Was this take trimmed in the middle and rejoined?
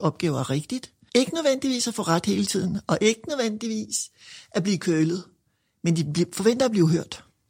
yes; 1 cut; at 1.1 s

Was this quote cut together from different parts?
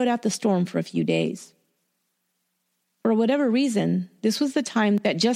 no; 0 cuts

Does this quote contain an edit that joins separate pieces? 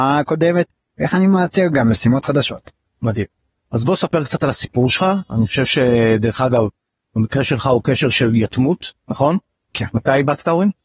yes; 1 cut; at 7.0 s

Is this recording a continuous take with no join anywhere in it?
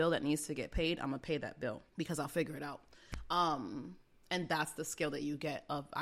no; 1 cut; at 1.9 s

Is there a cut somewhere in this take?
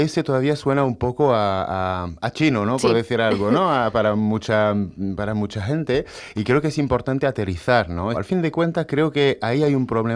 yes; 1 cut; at 8.1 s

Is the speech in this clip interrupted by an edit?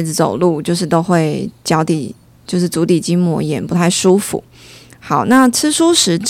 no; 0 cuts

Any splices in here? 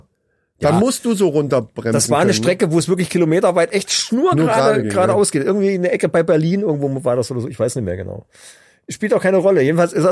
no; 0 cuts

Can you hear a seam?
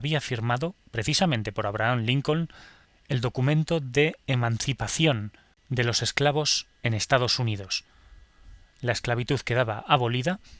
no; 0 cuts

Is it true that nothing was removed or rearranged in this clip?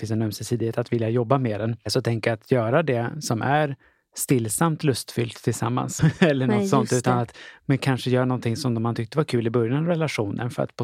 no; 1 cut; at 6.0 s

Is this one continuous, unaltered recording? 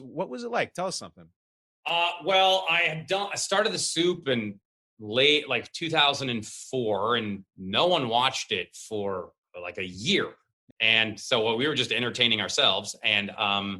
no; 1 cut; at 10.7 s

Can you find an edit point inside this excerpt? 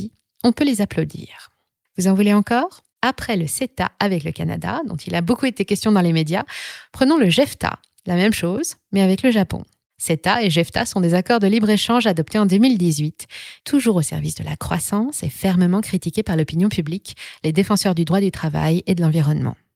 yes; 2 cuts; at 1.9 s, 13.6 s

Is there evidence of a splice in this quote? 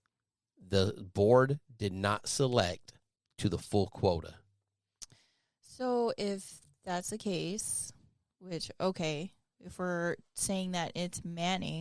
no; 0 cuts

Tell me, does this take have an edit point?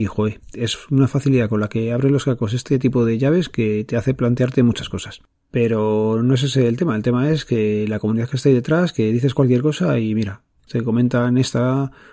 yes; 2 cuts; at 5.3 s, 10.7 s

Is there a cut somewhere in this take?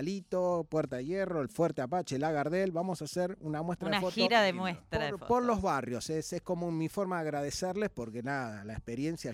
no; 0 cuts

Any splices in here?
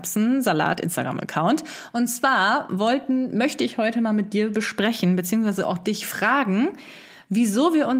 no; 0 cuts

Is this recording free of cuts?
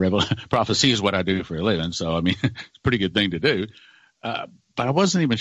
yes; 0 cuts

